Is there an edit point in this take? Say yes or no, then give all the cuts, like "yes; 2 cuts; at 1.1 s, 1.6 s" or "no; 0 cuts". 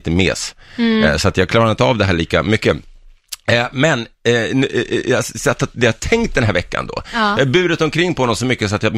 no; 0 cuts